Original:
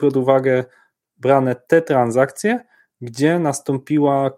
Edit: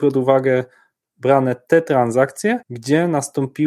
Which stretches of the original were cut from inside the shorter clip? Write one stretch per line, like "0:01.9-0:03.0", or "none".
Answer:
0:02.6-0:02.9